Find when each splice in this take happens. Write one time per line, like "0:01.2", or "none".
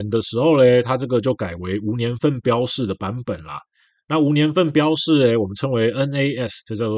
none